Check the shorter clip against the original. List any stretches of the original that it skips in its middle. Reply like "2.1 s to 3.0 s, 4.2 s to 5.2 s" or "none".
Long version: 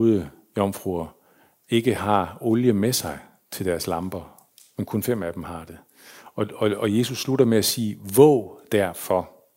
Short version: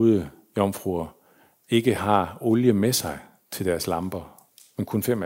none